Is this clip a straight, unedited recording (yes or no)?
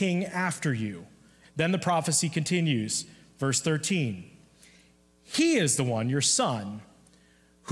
no